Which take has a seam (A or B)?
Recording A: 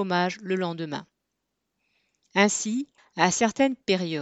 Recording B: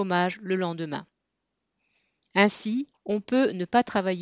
B